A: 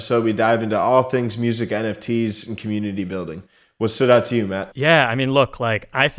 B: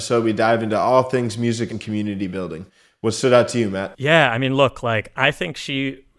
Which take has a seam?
B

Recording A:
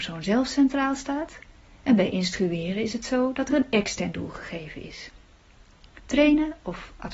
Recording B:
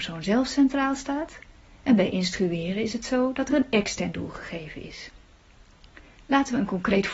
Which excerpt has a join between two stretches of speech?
A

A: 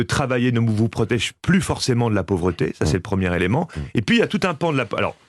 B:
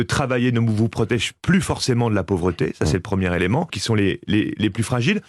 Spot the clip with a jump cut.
B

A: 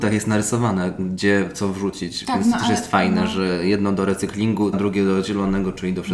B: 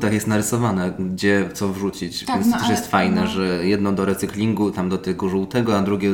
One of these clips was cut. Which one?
A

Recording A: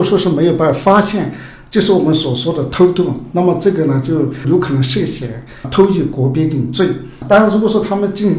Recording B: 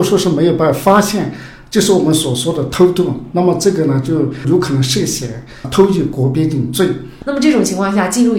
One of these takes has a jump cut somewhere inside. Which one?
B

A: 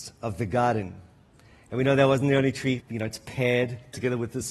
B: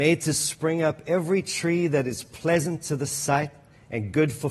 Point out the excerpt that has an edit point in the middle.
A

